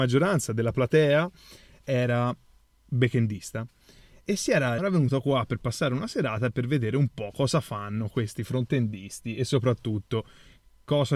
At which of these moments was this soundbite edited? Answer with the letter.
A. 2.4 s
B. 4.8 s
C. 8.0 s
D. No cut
B